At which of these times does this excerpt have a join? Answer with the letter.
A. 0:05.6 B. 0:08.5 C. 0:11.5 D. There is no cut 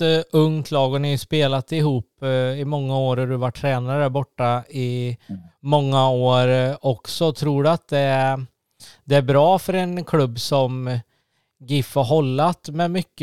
D